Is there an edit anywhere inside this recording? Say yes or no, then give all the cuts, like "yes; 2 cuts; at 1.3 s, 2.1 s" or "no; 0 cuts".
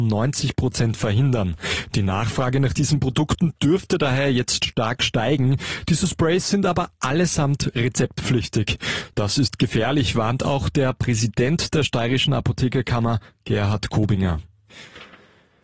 yes; 1 cut; at 9.1 s